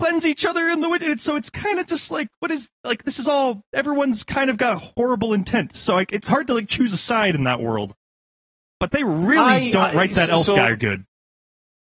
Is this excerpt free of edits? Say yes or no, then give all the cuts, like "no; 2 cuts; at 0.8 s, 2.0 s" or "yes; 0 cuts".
yes; 0 cuts